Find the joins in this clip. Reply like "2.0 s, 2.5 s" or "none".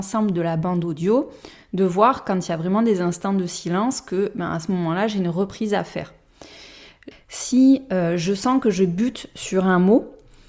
7.1 s